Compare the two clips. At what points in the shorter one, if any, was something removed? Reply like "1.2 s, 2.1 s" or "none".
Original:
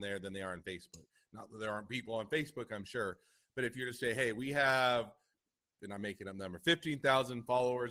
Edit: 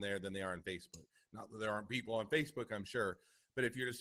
none